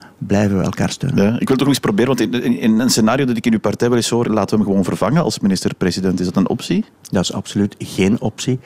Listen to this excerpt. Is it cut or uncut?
cut